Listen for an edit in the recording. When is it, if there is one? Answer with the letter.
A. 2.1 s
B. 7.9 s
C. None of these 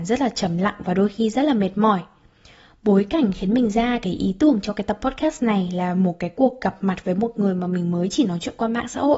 C